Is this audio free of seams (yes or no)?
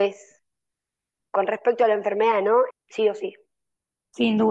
no